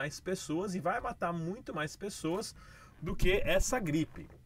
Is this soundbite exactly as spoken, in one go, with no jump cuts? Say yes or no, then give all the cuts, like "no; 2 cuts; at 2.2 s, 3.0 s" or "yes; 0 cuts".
yes; 0 cuts